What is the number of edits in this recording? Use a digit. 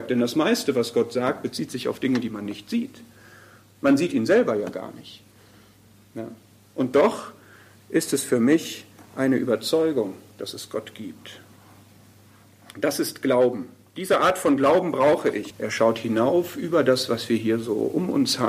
1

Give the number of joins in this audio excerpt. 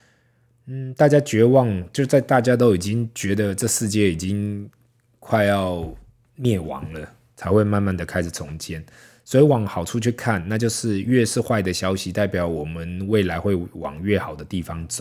0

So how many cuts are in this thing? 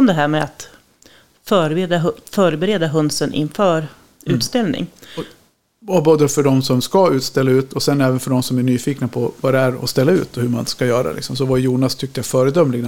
0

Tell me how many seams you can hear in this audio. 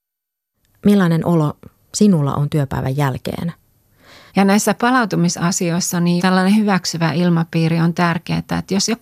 2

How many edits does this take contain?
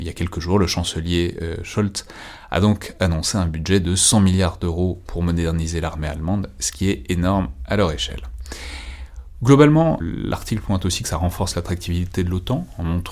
1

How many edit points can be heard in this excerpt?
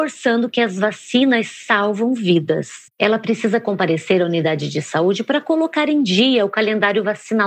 1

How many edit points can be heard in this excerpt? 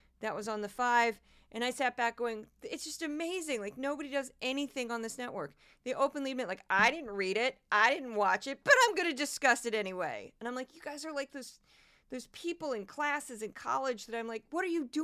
0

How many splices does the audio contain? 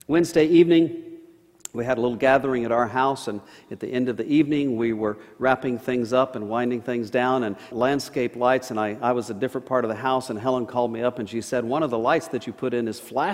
1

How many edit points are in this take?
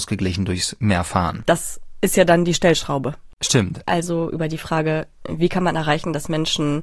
2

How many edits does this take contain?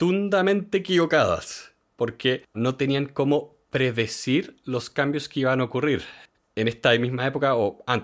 1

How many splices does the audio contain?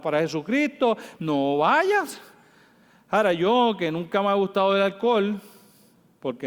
1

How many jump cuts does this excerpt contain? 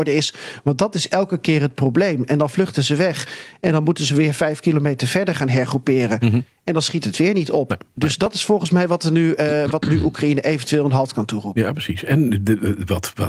0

